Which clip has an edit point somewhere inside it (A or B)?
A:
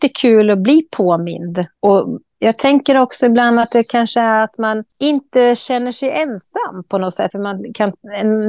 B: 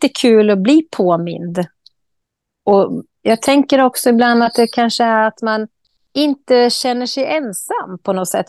A